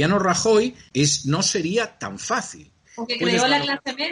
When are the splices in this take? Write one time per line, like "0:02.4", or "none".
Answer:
0:00.9
0:02.8